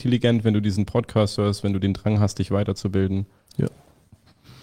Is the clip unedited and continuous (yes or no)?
yes